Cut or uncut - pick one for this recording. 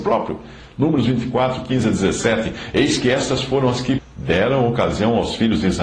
cut